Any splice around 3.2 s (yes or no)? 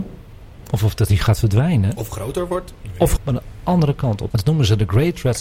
yes